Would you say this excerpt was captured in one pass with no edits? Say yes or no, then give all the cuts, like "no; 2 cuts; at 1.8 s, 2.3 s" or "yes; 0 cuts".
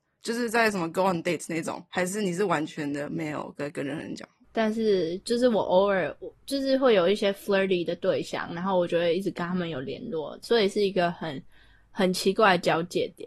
no; 2 cuts; at 4.4 s, 10.4 s